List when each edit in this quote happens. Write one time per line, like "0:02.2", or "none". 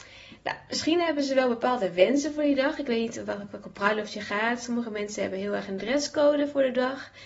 none